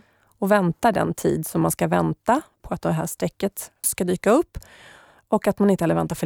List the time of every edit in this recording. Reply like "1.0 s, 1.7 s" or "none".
2.6 s, 3.8 s